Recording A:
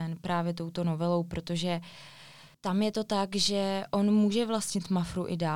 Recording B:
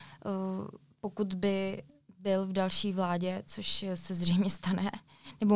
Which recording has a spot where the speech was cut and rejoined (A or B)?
A